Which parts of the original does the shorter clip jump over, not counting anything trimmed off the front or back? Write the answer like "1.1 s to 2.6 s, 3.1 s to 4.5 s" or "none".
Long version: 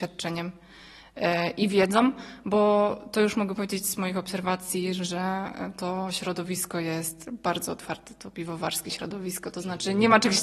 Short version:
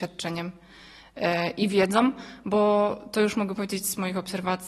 none